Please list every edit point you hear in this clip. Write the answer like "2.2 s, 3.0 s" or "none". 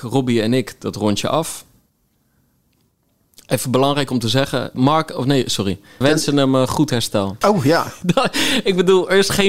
4.7 s, 6.0 s, 7.4 s